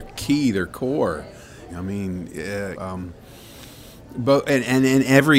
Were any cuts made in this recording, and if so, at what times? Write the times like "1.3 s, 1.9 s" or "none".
1.7 s, 2.7 s